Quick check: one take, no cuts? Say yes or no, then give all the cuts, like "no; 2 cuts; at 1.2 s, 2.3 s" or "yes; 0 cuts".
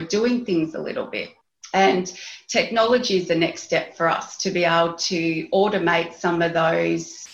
yes; 0 cuts